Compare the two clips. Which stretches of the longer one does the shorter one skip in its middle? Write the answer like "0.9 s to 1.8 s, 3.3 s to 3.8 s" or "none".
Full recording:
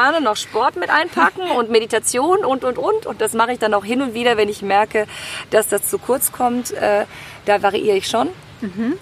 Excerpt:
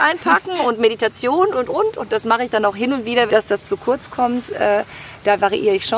2.4 s to 2.6 s, 4.4 s to 5.5 s